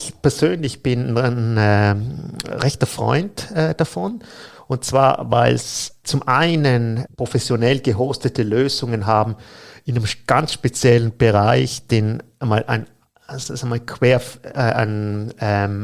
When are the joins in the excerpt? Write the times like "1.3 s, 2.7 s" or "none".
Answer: none